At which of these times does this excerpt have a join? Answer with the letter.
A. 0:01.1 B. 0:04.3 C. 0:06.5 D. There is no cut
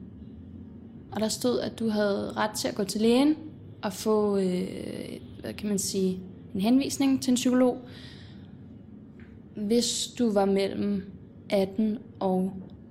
A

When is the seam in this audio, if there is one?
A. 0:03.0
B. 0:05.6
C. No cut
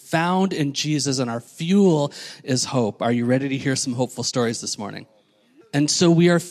B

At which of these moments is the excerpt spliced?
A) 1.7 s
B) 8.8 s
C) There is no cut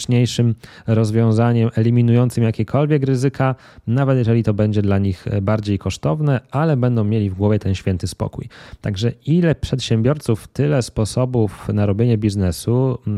C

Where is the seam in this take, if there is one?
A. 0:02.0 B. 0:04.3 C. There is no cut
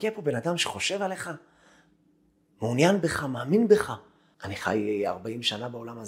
B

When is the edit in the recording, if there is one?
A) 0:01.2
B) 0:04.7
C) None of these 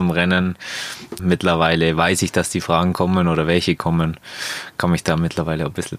A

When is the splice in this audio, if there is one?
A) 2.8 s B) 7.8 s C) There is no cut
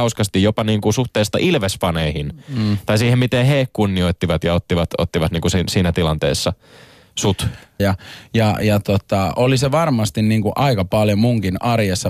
B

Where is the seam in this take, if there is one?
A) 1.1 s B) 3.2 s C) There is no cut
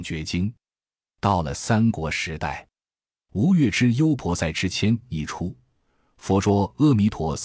C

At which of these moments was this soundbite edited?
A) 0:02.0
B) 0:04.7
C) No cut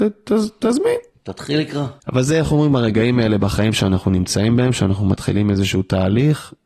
A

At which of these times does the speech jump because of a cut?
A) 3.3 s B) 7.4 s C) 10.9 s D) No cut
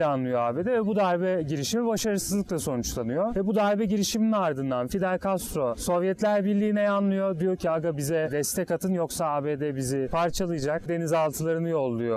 C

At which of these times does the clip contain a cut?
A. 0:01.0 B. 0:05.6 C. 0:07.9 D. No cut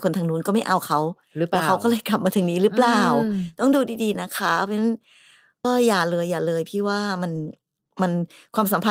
B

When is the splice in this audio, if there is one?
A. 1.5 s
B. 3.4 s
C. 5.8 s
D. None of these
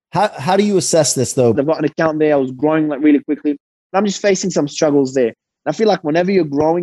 A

